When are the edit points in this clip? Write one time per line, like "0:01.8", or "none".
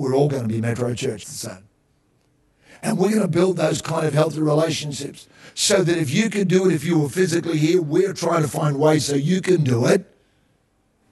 0:01.2